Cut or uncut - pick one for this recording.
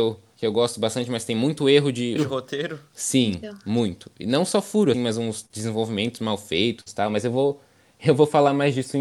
cut